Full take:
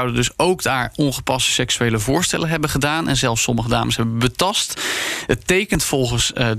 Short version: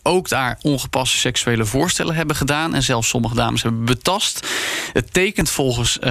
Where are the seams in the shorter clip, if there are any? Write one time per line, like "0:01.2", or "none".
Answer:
none